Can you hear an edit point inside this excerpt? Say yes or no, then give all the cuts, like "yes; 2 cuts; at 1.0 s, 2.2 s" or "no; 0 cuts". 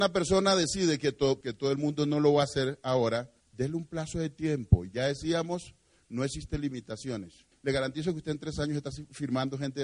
yes; 3 cuts; at 1.4 s, 3.4 s, 7.5 s